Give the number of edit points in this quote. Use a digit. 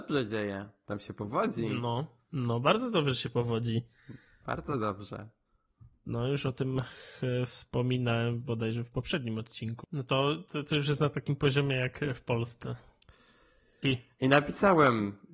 2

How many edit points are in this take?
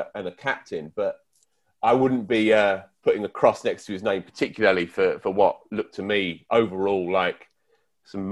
0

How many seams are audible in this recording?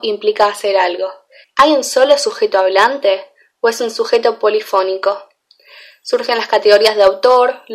1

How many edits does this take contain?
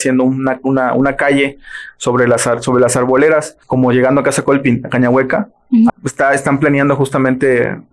2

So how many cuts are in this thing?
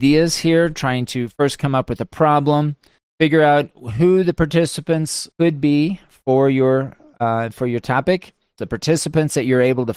3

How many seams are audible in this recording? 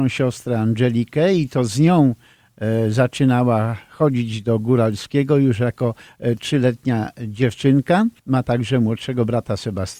1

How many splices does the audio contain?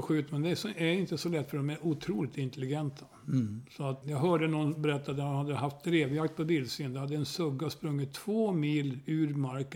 1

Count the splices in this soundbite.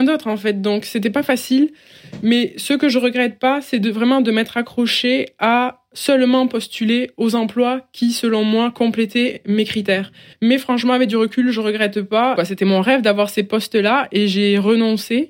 2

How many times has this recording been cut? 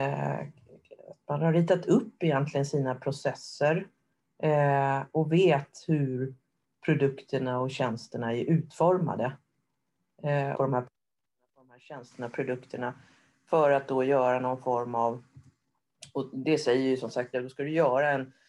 2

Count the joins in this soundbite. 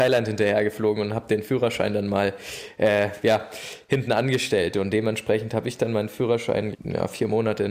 1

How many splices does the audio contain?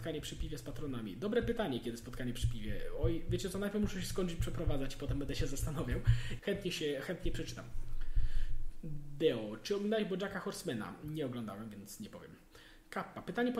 1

